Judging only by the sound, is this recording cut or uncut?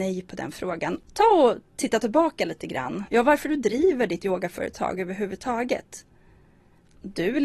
cut